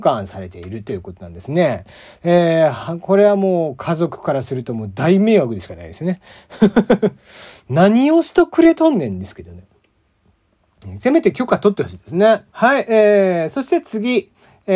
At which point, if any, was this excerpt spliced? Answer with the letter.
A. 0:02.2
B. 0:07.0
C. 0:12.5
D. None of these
C